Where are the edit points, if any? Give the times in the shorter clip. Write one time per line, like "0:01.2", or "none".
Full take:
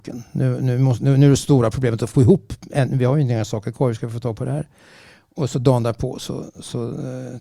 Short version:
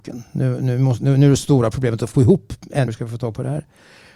0:02.9